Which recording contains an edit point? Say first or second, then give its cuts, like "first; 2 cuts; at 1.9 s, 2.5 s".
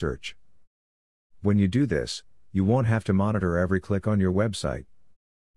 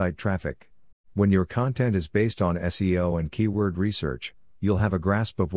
second; 1 cut; at 0.9 s